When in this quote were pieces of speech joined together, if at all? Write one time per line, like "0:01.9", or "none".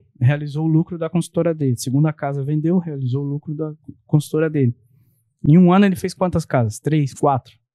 none

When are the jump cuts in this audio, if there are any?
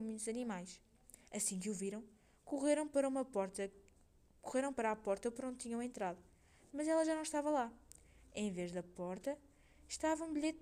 0:01.3

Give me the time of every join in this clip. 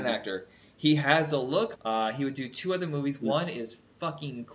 0:01.8

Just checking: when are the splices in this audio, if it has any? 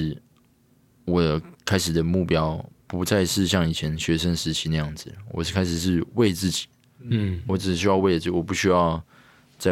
none

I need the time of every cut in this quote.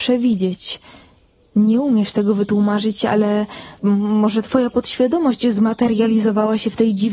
0:03.8

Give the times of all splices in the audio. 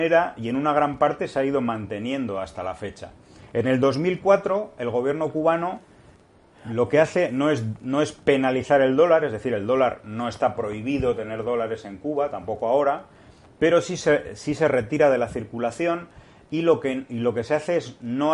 none

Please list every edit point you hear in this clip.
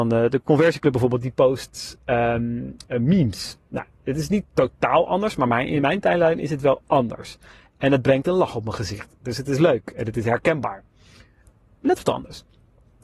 none

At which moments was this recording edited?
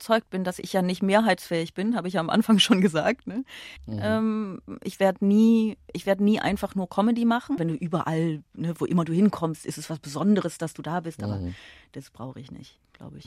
0:03.8
0:07.6

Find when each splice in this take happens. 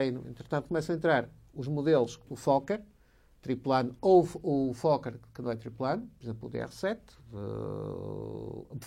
0:02.3

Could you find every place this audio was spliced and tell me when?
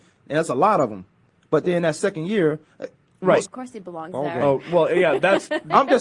0:03.4

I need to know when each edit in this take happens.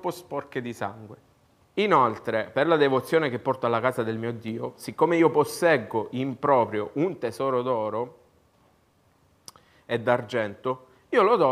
0:01.6

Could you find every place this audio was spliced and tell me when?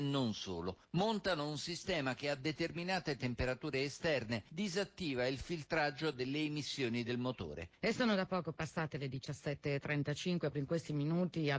0:07.8
0:10.5

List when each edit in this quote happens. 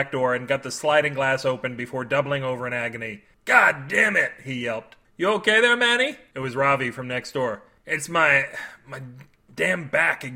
none

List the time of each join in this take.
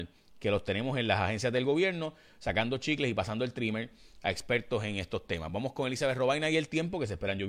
none

